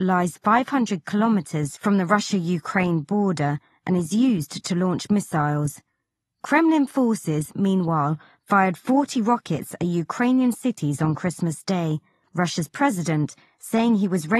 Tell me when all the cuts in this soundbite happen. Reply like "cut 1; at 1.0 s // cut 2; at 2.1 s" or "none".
cut 1; at 12.3 s